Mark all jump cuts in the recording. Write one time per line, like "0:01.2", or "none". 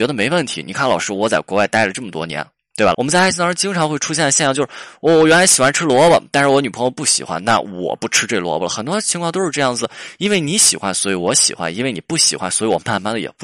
0:02.9